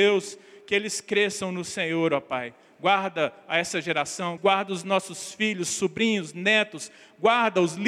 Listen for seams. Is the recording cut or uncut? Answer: cut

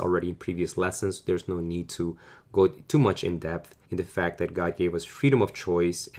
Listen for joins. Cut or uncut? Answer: cut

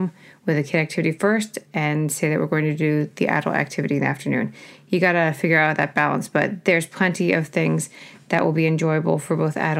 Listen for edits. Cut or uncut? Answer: uncut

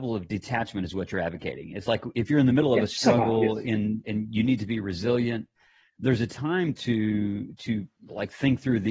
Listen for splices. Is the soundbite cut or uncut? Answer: uncut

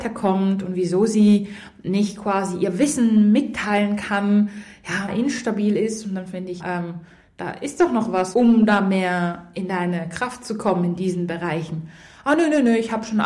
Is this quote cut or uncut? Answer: cut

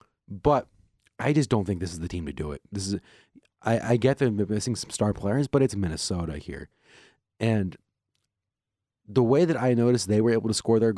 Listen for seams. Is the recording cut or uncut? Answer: uncut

